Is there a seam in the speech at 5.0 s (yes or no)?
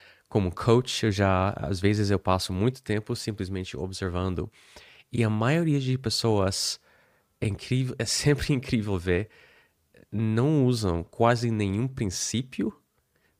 no